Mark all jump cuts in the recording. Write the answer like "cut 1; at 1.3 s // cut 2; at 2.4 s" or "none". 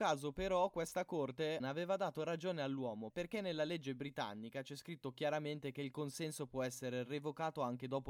cut 1; at 1.6 s // cut 2; at 3.1 s